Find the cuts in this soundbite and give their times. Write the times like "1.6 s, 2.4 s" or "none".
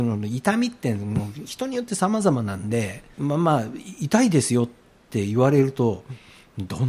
3.1 s